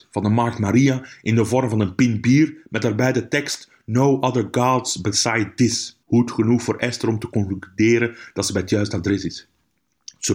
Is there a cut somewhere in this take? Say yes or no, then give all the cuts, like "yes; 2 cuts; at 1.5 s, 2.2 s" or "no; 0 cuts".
yes; 1 cut; at 6.0 s